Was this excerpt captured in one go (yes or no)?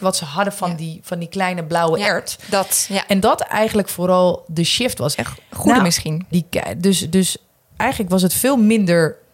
no